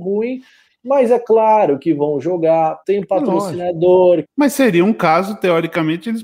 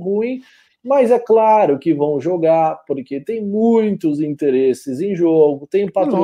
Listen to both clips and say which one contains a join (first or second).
first